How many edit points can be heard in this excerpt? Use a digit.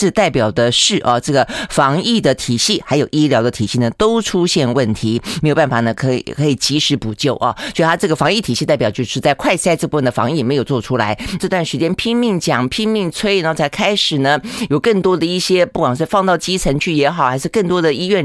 1